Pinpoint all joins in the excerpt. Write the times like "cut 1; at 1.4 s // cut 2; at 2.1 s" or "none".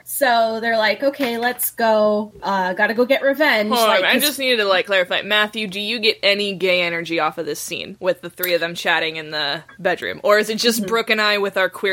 none